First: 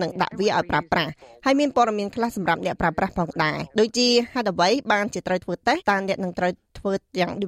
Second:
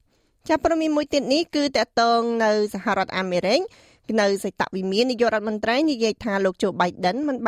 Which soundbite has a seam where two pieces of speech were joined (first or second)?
first